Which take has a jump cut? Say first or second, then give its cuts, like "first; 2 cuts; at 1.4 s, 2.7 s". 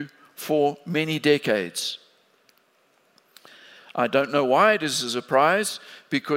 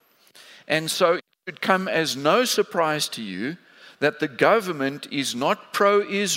first; 1 cut; at 3.8 s